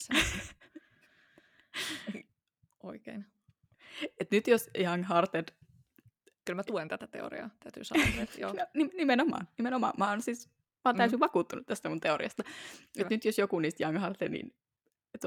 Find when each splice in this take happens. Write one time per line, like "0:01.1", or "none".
none